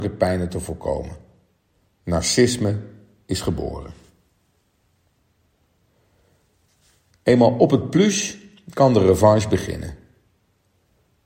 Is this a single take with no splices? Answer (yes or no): no